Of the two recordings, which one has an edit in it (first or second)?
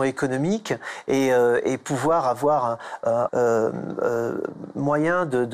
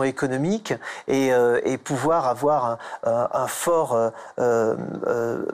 first